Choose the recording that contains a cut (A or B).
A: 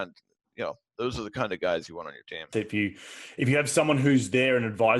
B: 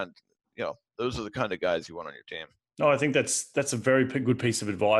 A